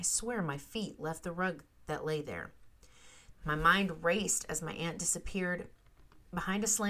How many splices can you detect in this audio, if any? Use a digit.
1